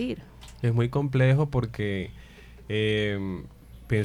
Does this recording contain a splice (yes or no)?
no